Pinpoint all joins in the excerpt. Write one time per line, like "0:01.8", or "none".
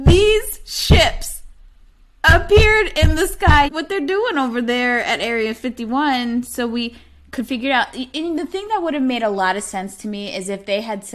0:03.7

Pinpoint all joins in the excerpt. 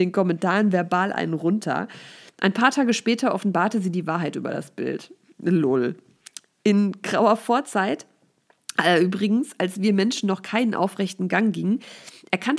none

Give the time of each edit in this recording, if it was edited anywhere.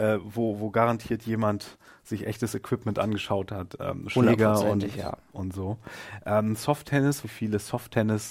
0:07.2

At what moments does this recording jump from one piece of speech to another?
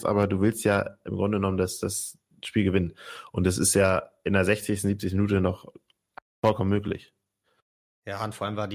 none

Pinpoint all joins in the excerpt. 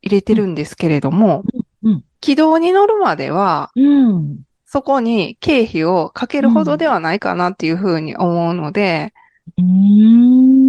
none

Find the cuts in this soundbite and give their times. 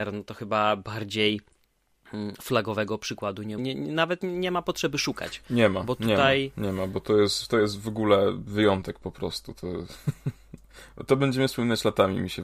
0:03.6

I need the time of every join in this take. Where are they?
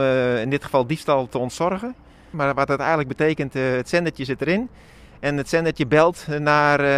0:02.3

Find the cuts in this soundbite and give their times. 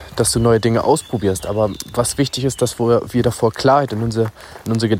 none

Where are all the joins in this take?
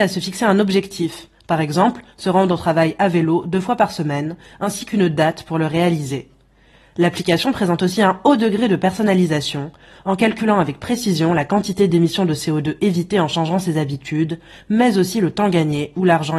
none

